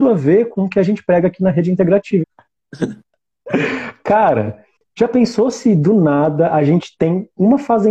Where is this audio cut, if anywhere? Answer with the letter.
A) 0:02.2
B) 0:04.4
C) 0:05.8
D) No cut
A